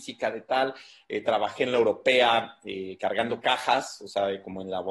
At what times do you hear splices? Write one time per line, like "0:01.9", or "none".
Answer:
none